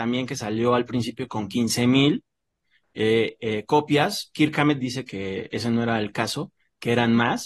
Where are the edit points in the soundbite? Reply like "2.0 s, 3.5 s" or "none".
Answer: none